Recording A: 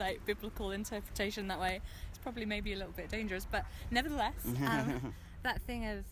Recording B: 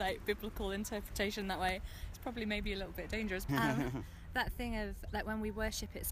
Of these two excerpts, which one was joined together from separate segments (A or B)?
B